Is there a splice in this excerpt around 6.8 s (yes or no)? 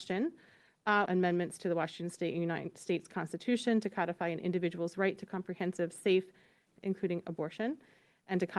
yes